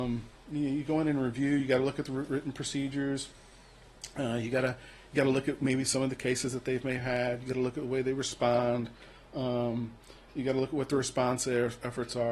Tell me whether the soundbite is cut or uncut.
uncut